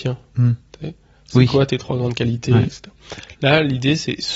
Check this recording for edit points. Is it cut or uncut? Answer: uncut